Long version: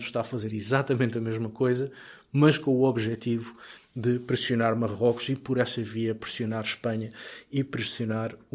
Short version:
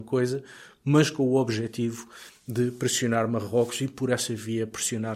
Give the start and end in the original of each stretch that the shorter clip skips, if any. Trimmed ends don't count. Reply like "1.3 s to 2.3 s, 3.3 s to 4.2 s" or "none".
none